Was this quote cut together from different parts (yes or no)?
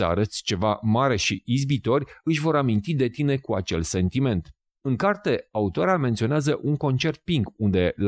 no